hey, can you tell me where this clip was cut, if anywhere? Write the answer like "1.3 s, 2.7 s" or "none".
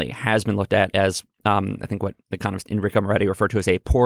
2.2 s